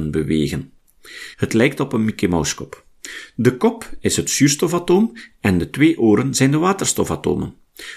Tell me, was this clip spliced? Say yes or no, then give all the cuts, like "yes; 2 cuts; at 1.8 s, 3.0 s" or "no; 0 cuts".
yes; 1 cut; at 1.3 s